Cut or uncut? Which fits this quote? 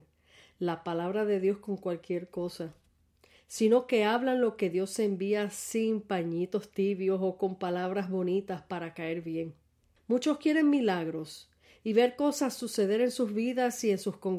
cut